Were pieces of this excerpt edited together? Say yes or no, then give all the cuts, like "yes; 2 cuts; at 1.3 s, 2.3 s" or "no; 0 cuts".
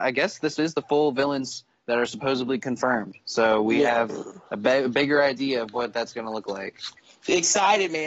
no; 0 cuts